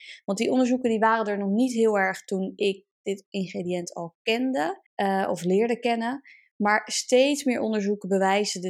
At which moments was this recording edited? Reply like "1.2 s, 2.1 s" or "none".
4.9 s